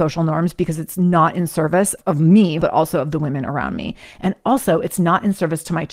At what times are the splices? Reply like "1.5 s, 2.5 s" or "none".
2.6 s